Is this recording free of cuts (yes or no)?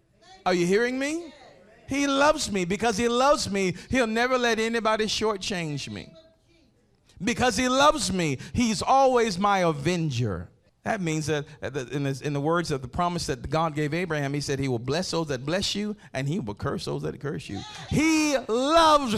no